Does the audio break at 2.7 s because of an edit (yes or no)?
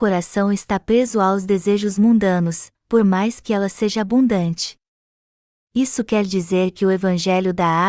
yes